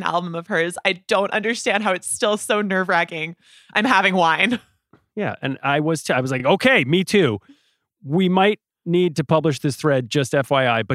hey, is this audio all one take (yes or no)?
yes